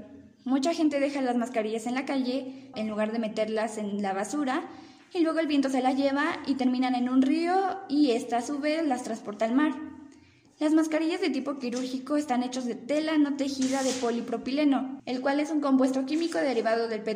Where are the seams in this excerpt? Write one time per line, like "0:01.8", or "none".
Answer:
0:02.7
0:15.0